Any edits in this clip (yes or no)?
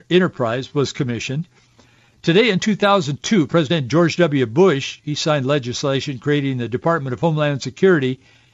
no